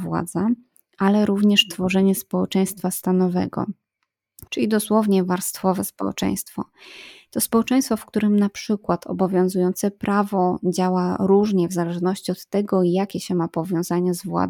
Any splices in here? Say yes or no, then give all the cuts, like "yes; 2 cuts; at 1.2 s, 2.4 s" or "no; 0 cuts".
yes; 1 cut; at 4.5 s